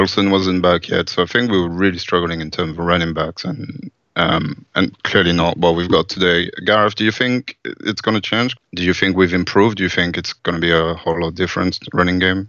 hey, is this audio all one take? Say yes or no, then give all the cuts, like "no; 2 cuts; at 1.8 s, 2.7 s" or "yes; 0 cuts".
no; 1 cut; at 8.6 s